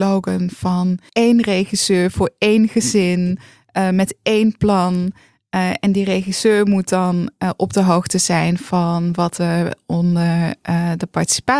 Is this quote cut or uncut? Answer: uncut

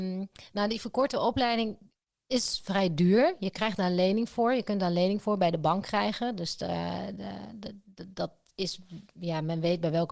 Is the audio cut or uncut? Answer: uncut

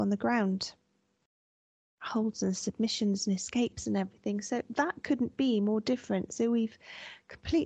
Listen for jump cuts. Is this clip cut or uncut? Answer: uncut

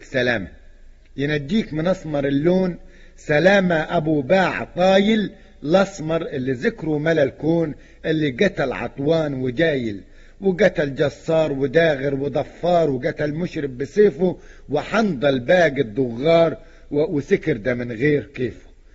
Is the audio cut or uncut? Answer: uncut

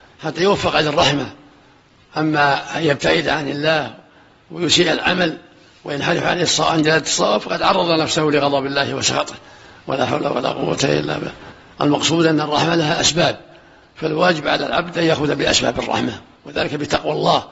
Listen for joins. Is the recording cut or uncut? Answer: uncut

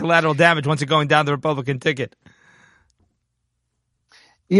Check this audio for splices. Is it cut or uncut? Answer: uncut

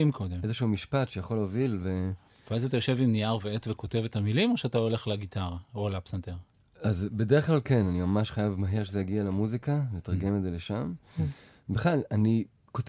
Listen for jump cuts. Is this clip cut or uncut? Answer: uncut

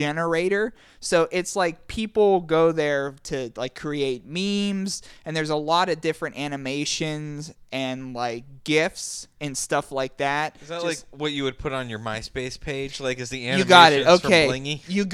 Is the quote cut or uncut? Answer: uncut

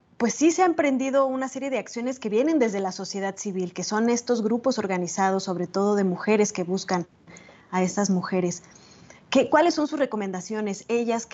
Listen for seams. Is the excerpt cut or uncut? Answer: uncut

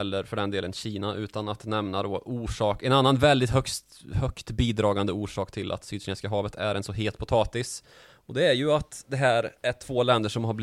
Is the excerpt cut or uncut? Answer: uncut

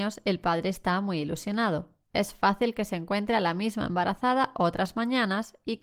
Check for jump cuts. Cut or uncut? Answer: cut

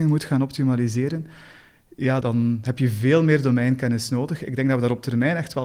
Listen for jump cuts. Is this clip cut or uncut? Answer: cut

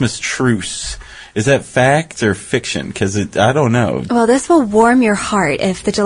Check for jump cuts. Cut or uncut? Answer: cut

